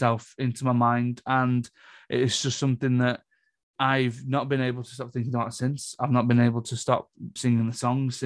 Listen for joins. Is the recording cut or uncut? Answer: cut